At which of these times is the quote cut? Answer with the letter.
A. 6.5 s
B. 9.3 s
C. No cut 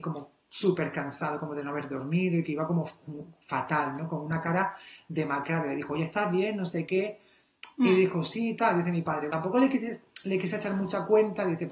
B